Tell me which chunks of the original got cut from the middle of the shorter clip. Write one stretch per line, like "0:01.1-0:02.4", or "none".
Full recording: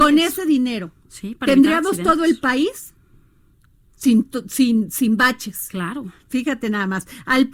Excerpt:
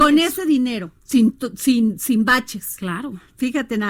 0:01.0-0:03.9